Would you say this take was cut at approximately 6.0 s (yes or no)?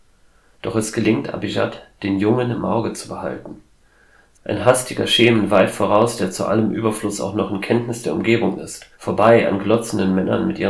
no